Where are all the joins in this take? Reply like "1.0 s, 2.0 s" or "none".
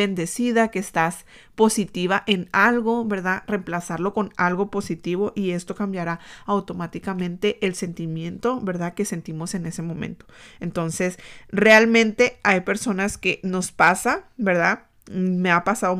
none